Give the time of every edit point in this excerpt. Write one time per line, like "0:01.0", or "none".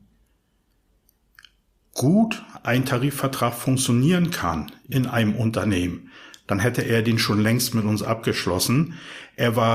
none